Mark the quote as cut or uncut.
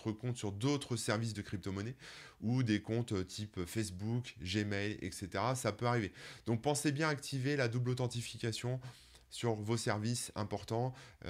uncut